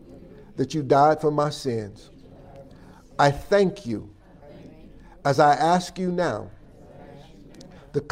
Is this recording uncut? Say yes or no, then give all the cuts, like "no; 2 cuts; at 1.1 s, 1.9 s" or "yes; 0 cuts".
yes; 0 cuts